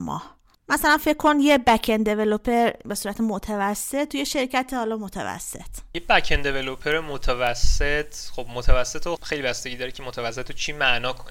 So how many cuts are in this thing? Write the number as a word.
one